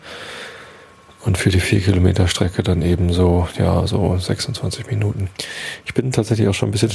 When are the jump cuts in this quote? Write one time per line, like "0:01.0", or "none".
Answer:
none